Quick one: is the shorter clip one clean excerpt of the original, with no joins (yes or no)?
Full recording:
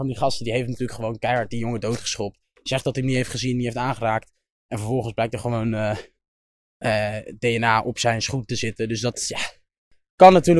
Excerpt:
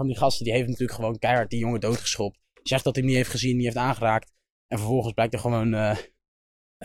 yes